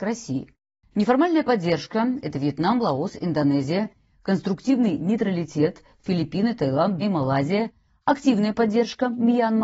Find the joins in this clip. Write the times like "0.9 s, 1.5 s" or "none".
7.0 s